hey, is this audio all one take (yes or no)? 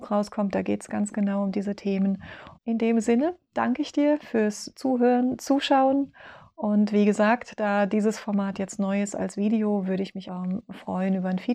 no